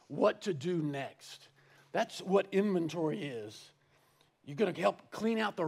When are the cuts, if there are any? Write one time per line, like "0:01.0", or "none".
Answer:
0:04.3